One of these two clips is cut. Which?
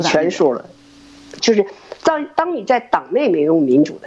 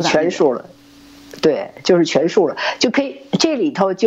first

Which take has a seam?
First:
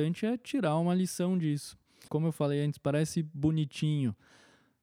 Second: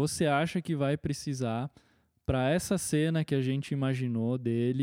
first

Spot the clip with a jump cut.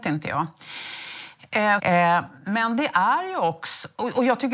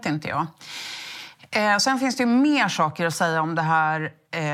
first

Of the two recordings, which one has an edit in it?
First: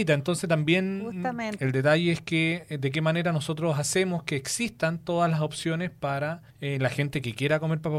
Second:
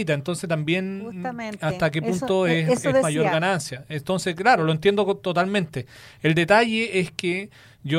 first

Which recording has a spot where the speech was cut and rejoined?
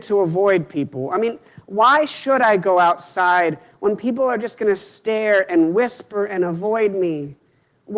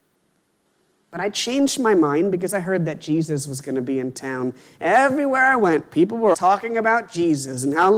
second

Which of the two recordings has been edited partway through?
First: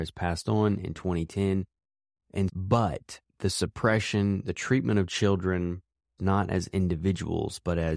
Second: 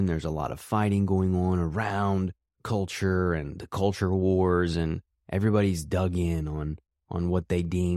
first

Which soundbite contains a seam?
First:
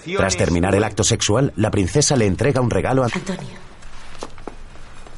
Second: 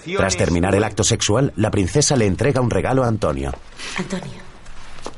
first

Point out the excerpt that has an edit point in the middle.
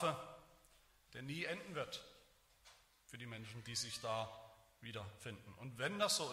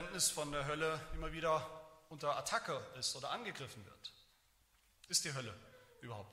second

